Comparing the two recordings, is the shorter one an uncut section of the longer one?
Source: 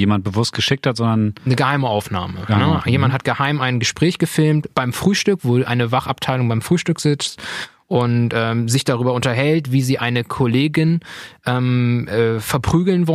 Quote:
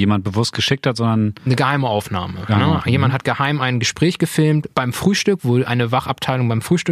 yes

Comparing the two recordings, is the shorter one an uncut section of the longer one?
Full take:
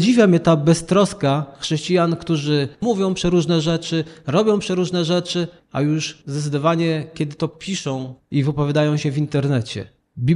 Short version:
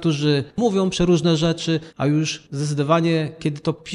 no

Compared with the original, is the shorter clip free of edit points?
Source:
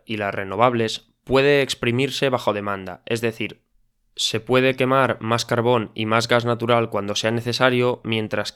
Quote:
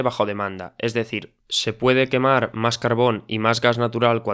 no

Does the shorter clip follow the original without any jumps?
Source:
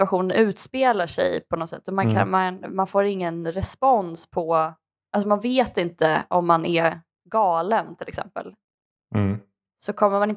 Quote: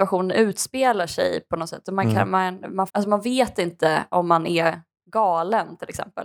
no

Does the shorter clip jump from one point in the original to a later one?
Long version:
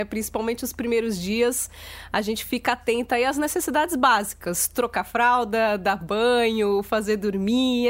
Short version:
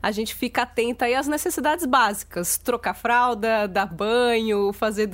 no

